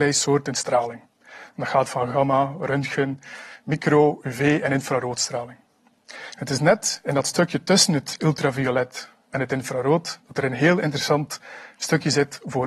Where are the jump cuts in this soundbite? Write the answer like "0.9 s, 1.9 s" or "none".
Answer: none